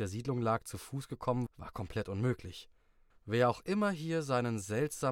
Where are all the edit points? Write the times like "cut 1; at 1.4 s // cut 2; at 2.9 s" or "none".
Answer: cut 1; at 1.5 s // cut 2; at 3.1 s